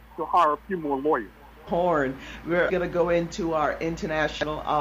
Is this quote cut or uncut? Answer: cut